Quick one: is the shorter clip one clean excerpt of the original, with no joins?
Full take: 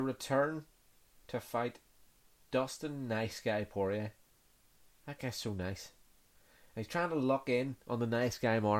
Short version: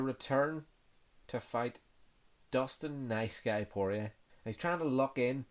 no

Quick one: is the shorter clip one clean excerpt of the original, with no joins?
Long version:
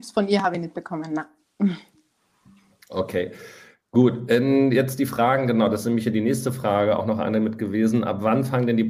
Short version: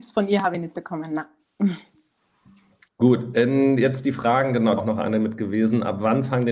no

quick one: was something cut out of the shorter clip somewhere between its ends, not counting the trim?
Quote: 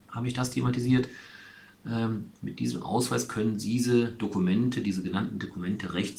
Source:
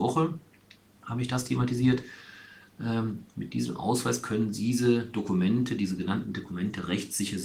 no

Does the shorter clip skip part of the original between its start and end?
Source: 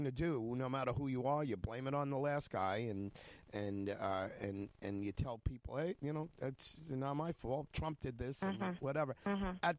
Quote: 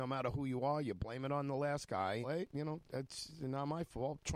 yes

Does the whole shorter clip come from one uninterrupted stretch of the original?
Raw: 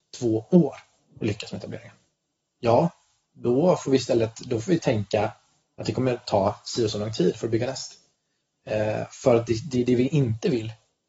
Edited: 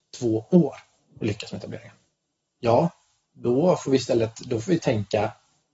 yes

